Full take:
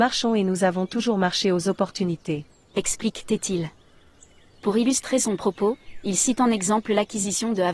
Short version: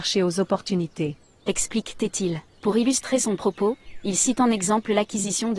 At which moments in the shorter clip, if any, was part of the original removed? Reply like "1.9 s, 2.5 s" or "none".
2.5 s